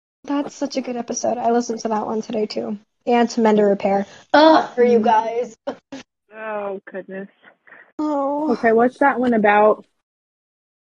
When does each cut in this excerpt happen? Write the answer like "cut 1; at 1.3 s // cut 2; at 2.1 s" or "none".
cut 1; at 4.8 s